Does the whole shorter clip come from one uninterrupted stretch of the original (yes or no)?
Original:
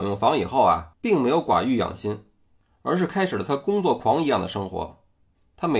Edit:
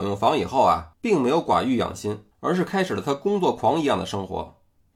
no